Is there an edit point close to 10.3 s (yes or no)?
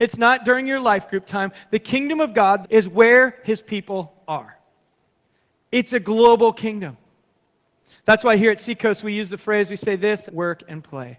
yes